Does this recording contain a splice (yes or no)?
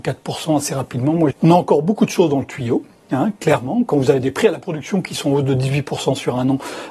yes